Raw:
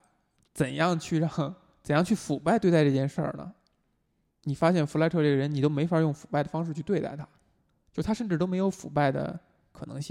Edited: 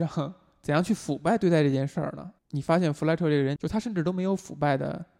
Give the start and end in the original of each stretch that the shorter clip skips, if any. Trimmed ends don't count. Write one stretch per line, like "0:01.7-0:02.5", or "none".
0:03.6-0:04.3
0:05.5-0:07.9